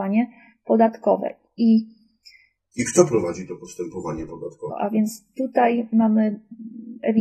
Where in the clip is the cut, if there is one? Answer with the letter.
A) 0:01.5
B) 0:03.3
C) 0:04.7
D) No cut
C